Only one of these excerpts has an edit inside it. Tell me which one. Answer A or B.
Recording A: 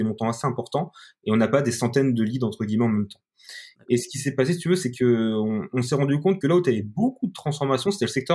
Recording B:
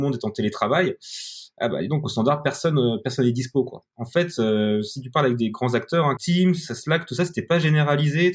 B